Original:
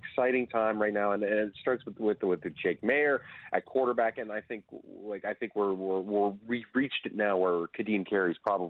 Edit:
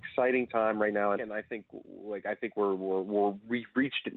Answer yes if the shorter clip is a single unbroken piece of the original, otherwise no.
no